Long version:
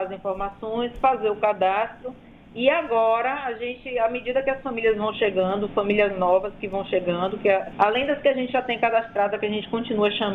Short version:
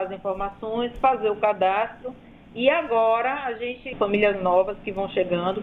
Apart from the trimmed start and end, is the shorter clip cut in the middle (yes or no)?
yes